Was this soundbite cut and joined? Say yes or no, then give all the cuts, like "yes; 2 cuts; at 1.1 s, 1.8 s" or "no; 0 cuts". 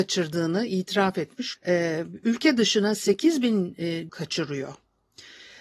yes; 2 cuts; at 1.6 s, 4.1 s